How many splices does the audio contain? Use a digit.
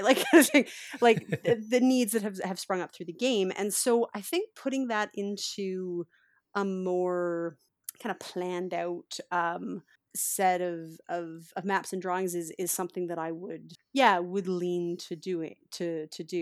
0